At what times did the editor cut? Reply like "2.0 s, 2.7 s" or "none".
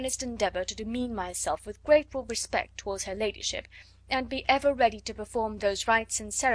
none